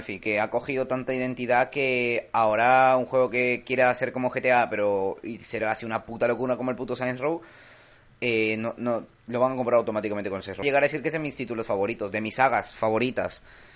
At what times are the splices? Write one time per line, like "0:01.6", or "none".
0:10.6